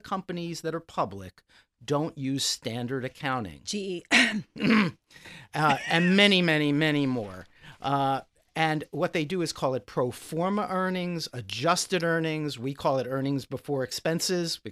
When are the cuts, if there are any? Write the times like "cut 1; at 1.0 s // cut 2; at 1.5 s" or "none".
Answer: none